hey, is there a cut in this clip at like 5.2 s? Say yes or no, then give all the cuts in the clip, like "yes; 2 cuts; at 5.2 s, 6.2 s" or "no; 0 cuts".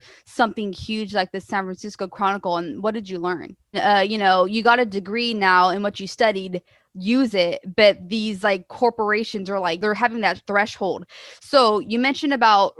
no; 1 cut; at 3.7 s